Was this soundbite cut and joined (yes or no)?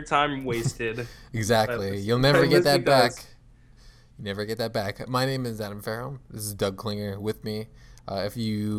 no